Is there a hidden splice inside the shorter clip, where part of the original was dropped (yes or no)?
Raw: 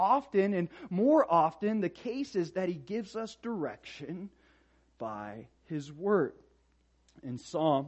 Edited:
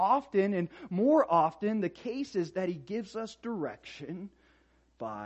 no